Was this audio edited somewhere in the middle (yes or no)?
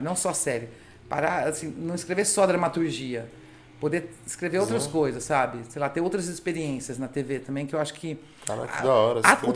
no